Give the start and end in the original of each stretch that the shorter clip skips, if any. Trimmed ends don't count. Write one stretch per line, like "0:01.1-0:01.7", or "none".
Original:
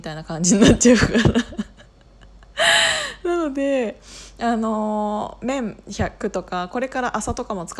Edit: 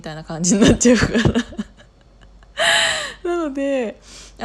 none